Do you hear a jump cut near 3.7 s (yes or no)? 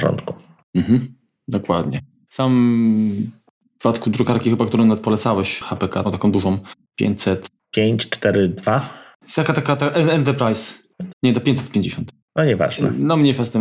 no